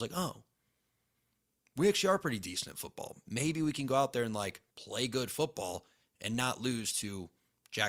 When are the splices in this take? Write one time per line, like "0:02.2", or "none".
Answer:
0:04.7